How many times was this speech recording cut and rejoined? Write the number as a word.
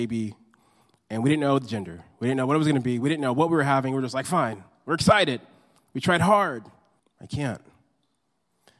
one